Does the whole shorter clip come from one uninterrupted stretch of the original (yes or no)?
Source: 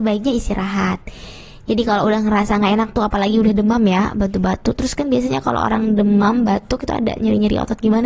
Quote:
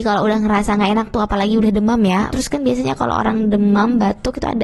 no